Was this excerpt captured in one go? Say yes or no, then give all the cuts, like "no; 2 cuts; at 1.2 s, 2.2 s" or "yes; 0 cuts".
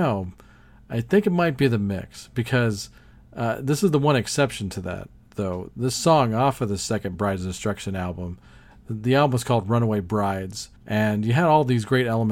no; 1 cut; at 10.8 s